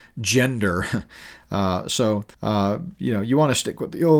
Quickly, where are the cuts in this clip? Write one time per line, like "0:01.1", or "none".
0:02.3